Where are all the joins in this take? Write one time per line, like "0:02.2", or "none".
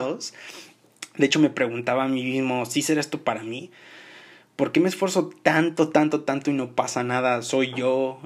none